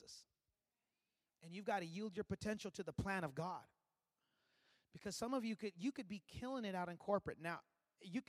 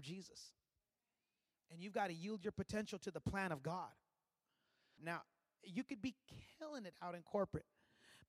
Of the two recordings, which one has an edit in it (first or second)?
second